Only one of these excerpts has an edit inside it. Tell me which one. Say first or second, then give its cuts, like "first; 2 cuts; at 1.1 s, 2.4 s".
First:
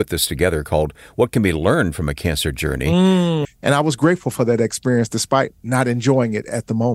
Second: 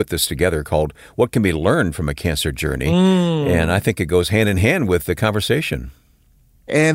first; 1 cut; at 3.4 s